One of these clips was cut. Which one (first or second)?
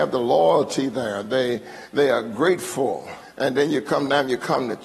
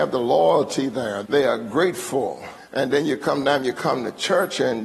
second